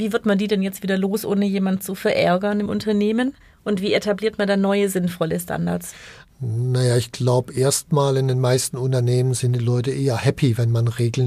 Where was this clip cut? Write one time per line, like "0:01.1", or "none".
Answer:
none